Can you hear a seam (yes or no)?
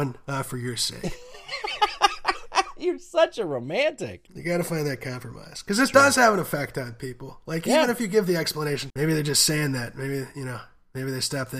yes